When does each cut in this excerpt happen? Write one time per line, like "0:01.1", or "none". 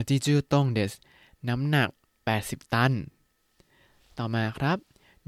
none